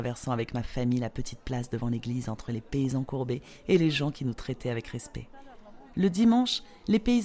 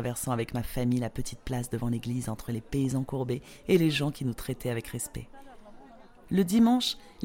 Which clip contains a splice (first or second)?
first